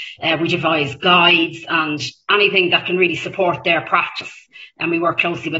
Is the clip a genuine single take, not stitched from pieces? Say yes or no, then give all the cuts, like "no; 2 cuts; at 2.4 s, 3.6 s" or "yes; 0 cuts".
yes; 0 cuts